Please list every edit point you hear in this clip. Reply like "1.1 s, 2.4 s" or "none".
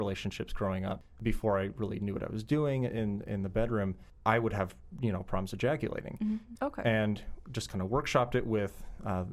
6.6 s